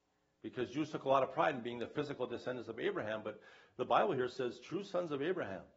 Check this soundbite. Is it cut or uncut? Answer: uncut